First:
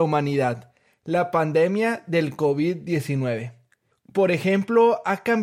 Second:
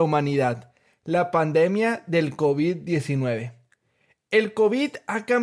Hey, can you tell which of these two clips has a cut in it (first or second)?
first